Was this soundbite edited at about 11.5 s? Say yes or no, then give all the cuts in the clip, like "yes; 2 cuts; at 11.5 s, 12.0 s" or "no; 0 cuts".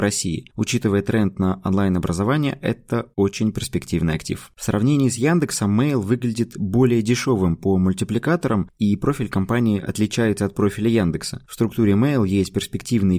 no; 0 cuts